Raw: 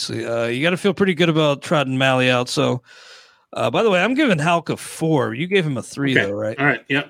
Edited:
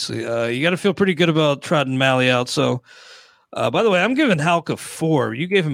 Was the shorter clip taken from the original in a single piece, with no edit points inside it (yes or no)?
yes